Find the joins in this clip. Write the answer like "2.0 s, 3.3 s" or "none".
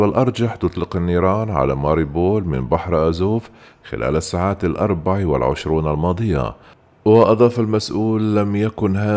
none